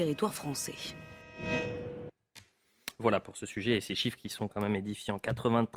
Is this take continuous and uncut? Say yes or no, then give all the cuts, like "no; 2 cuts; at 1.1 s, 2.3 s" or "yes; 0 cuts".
yes; 0 cuts